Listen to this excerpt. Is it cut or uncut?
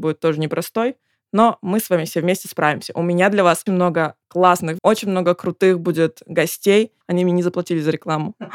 cut